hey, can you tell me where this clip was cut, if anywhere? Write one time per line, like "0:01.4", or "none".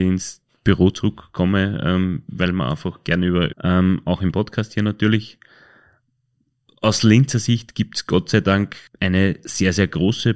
0:03.5
0:08.9